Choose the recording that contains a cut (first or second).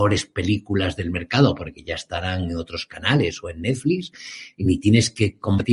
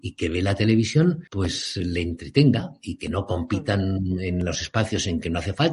second